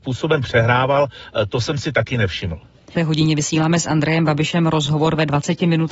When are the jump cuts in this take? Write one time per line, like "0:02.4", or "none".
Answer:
0:02.9